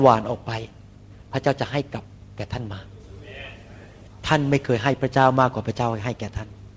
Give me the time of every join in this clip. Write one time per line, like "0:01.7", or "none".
none